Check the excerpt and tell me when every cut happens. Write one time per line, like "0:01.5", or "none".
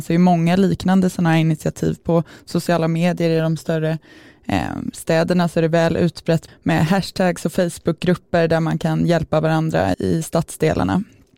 0:06.5
0:09.9